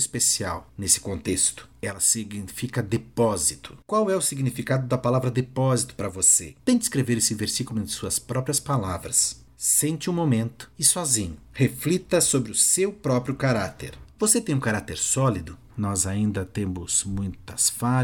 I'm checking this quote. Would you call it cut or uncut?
cut